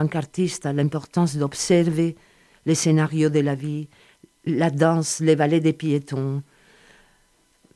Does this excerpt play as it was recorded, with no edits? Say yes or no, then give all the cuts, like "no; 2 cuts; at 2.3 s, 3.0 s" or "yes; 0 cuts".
yes; 0 cuts